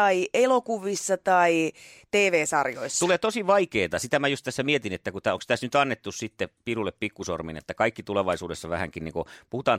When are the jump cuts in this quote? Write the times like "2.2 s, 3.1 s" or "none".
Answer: none